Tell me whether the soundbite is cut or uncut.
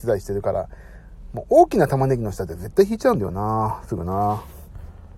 uncut